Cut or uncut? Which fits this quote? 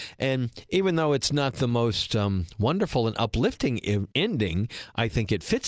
cut